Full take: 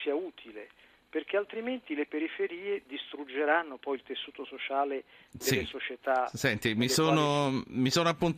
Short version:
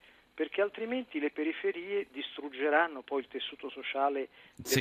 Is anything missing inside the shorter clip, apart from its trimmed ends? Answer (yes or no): no